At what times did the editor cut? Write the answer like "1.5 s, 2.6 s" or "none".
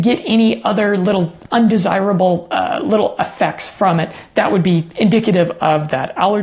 none